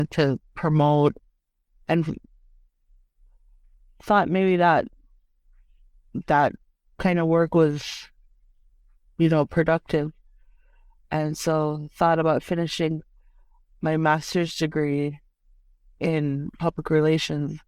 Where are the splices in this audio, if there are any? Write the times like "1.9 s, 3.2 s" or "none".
none